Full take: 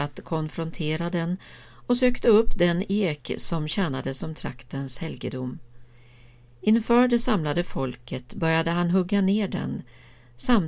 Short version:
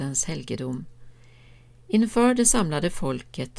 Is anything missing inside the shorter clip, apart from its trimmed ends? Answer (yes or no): no